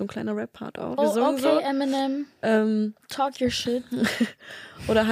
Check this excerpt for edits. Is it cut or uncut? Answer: cut